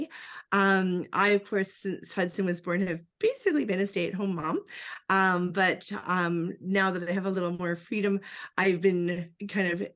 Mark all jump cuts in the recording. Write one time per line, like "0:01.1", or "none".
none